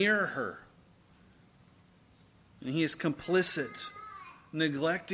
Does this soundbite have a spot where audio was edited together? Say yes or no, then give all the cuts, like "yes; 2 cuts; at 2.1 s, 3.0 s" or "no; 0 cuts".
no; 0 cuts